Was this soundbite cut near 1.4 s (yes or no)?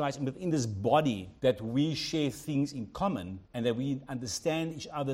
yes